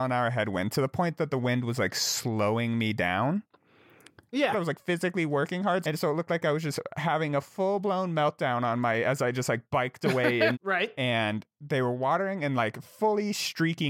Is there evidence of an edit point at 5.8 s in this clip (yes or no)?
yes